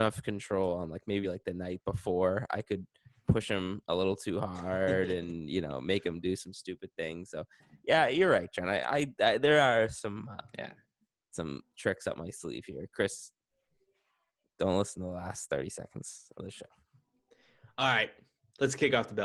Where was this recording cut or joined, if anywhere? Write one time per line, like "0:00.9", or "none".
none